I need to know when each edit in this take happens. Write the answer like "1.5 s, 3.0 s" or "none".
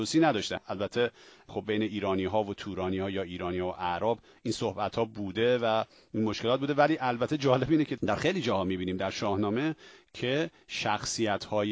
none